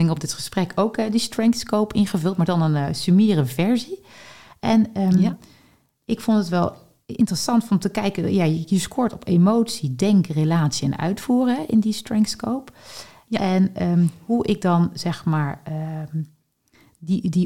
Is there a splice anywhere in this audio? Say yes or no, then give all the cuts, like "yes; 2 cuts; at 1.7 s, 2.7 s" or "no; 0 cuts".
no; 0 cuts